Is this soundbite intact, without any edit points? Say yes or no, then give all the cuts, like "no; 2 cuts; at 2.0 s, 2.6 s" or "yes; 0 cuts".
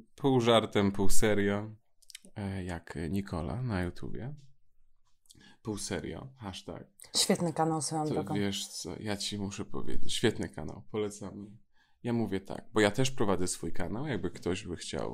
yes; 0 cuts